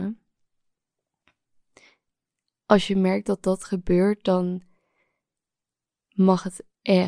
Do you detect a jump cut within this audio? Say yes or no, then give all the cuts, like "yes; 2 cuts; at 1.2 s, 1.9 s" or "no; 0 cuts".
no; 0 cuts